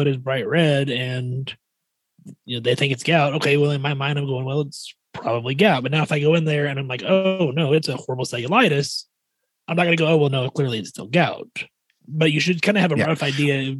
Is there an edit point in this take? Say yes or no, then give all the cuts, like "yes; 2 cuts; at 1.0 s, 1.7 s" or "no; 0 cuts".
no; 0 cuts